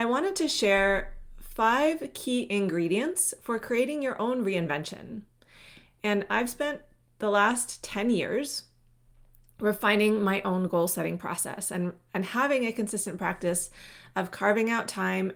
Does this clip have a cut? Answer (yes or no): no